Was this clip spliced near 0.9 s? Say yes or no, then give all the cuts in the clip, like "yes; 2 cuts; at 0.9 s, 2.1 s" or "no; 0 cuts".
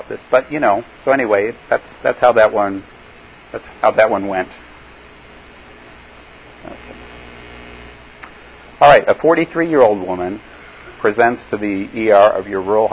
yes; 1 cut; at 0.9 s